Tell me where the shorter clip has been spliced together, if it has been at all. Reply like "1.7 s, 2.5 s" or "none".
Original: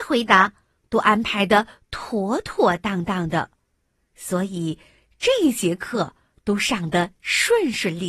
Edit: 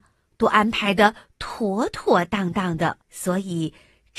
3.0 s